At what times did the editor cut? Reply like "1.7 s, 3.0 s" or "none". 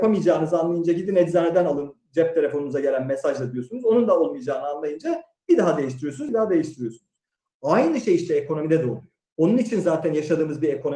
6.3 s